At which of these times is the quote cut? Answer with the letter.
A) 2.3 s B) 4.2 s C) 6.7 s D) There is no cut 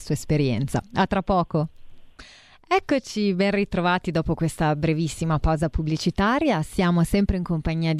D